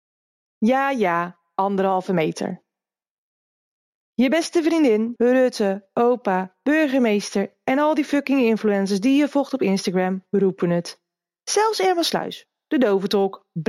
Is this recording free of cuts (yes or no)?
no